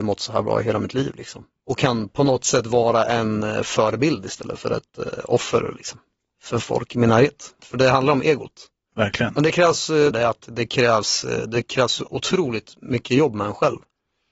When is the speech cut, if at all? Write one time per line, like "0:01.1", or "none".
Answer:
0:07.6
0:08.9
0:10.1